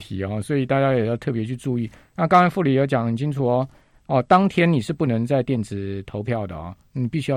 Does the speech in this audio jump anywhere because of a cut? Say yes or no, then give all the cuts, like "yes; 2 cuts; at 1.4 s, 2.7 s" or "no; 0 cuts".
no; 0 cuts